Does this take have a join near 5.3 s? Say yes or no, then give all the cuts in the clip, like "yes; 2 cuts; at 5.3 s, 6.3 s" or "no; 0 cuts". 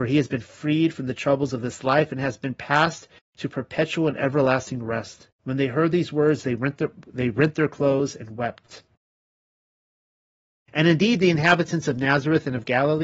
yes; 1 cut; at 5.3 s